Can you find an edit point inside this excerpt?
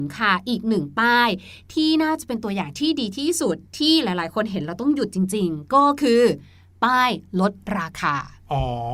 yes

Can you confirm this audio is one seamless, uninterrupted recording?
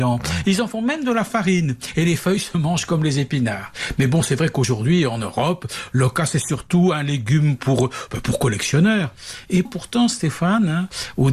no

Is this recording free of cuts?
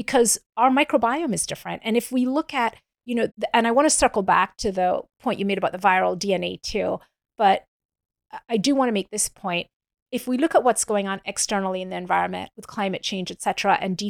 no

